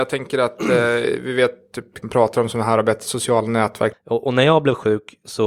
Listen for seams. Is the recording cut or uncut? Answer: cut